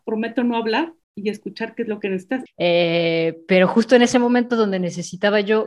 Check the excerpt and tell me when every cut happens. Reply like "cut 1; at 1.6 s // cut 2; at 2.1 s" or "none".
cut 1; at 1.0 s // cut 2; at 2.5 s